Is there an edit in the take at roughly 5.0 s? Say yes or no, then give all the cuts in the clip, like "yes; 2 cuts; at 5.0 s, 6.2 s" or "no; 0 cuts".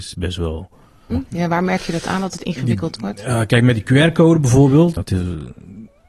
yes; 2 cuts; at 1.1 s, 5.0 s